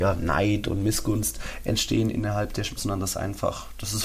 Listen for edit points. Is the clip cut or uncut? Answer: cut